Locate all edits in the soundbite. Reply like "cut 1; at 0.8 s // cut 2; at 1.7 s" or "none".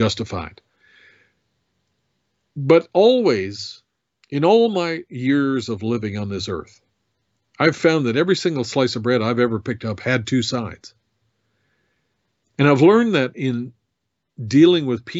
none